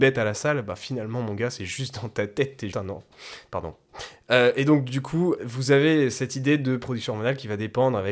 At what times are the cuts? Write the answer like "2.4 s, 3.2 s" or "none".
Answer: 2.7 s, 5.4 s